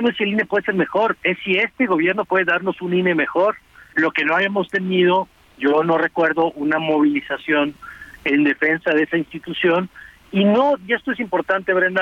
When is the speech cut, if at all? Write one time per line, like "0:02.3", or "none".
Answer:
0:03.9

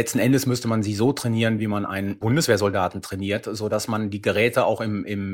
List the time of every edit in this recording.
none

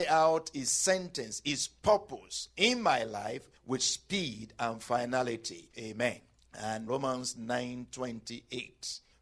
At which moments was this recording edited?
0:05.7
0:06.9

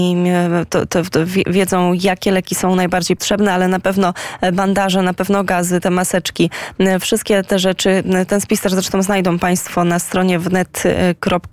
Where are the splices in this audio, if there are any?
0:03.2

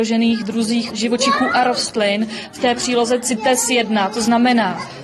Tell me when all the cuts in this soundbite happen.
none

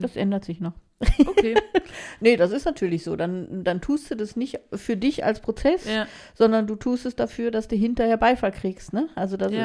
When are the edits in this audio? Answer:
none

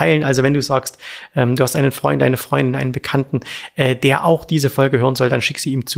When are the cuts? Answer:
none

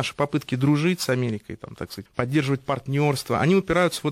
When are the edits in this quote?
0:02.1

